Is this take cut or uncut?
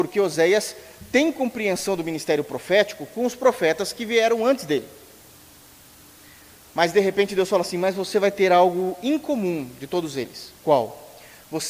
uncut